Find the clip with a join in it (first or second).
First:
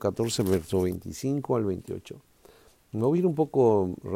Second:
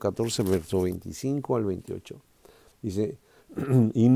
second